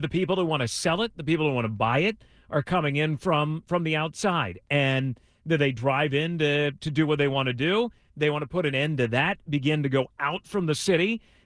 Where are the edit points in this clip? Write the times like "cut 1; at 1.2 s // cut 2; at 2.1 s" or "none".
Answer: none